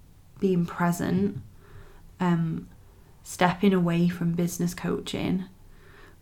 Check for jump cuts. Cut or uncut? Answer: cut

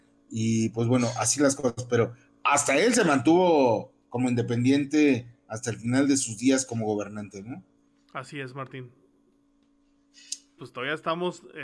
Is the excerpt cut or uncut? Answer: cut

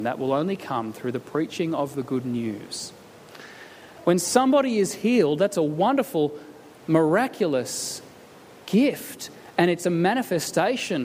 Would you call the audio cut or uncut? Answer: cut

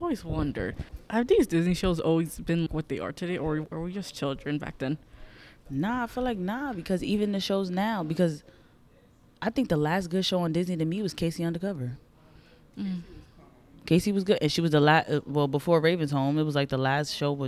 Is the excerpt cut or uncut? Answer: cut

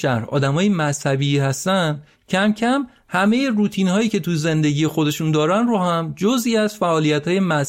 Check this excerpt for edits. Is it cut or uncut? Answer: uncut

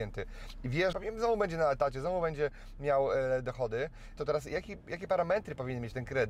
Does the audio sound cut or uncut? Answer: cut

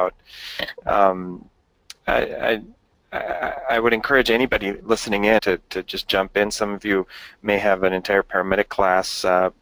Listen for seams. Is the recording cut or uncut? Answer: cut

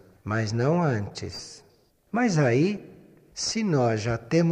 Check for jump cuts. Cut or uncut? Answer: cut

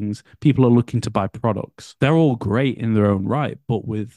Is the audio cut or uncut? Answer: cut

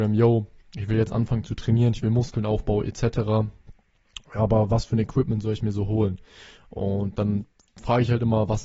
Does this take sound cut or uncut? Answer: uncut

